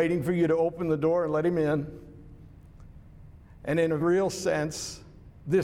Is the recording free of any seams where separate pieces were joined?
no; 1 cut; at 4.0 s

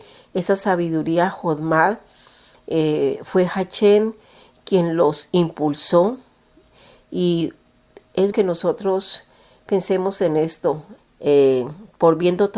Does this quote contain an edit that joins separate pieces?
yes; 2 cuts; at 8.3 s, 11.0 s

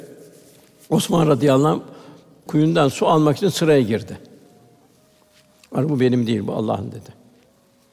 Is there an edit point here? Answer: yes; 1 cut; at 2.5 s

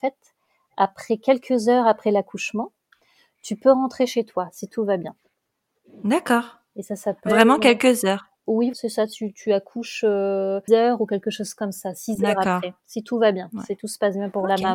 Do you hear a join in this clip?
yes; 2 cuts; at 8.7 s, 10.7 s

